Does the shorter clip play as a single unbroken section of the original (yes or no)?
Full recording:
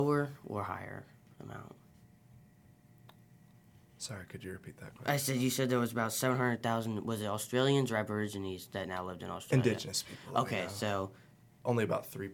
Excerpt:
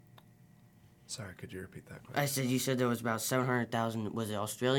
yes